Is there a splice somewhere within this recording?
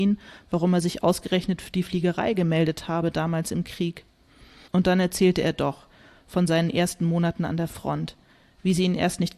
yes; 1 cut; at 4.7 s

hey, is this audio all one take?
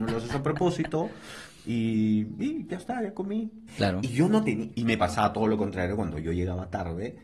no; 2 cuts; at 3.7 s, 4.7 s

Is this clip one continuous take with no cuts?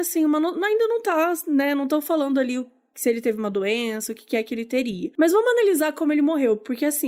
yes; 0 cuts

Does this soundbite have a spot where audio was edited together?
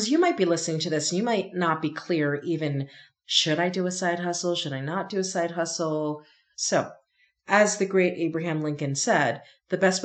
yes; 1 cut; at 6.5 s

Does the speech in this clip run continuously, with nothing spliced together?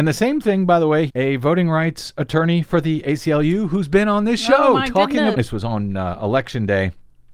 no; 2 cuts; at 1.1 s, 5.3 s

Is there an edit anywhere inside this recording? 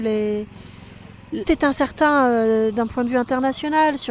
yes; 1 cut; at 1.4 s

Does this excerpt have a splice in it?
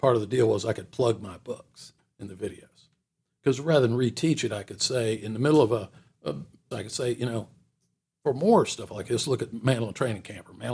yes; 1 cut; at 6.7 s

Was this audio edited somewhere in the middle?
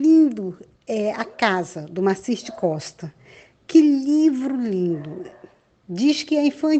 no; 0 cuts

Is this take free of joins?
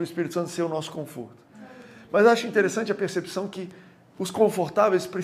yes; 0 cuts

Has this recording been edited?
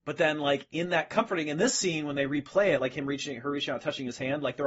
no; 0 cuts

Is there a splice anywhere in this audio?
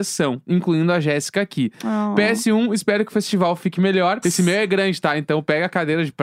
yes; 1 cut; at 4.2 s

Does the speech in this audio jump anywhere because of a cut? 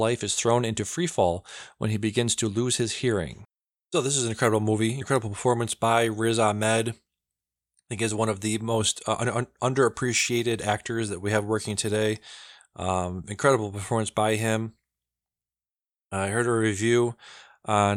yes; 1 cut; at 5.0 s

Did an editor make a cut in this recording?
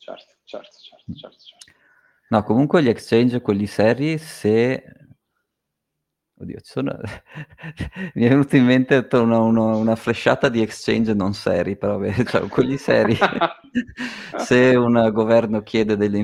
no; 0 cuts

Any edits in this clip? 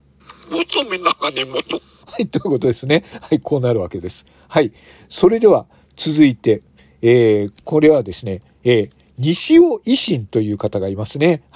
no; 0 cuts

